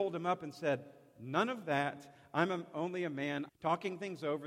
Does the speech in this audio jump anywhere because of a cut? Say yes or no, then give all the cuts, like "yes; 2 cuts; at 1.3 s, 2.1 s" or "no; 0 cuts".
yes; 1 cut; at 3.5 s